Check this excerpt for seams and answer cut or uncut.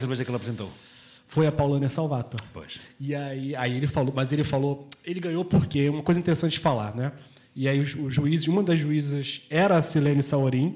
uncut